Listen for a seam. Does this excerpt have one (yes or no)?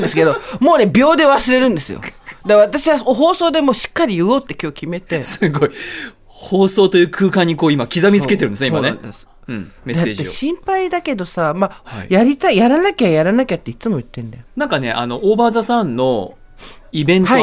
yes